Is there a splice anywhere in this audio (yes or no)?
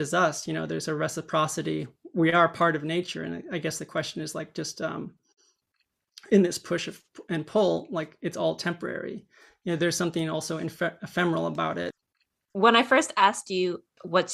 no